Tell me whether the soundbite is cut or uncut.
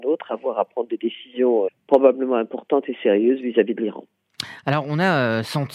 cut